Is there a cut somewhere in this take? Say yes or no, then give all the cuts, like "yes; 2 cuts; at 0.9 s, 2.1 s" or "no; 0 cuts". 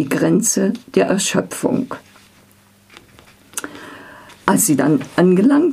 no; 0 cuts